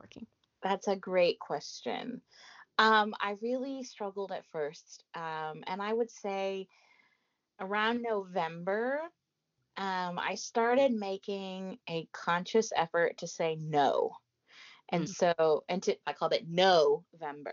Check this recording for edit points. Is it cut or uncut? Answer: cut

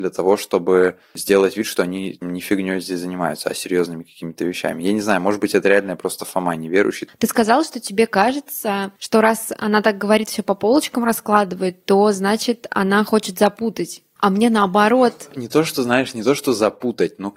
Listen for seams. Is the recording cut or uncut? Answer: uncut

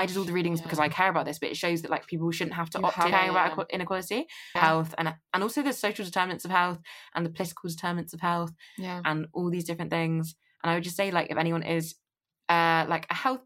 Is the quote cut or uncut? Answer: cut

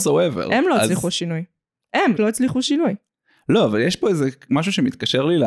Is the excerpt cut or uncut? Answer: cut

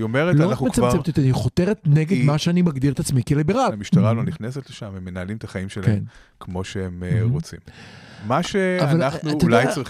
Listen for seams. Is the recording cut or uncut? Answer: cut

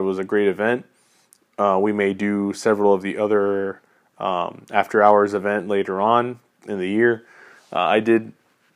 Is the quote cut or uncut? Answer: uncut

